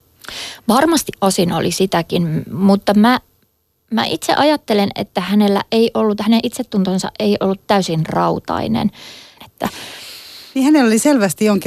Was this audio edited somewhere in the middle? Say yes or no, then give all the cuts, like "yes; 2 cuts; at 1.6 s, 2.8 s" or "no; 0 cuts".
yes; 2 cuts; at 1.1 s, 9.4 s